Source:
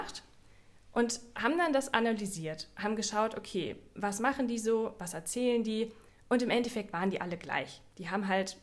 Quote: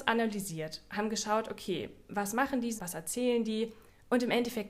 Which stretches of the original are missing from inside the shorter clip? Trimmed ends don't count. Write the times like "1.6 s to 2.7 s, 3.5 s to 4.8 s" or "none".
4.6 s to 4.9 s